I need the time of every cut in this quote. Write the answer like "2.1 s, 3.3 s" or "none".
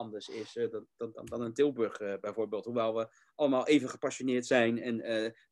none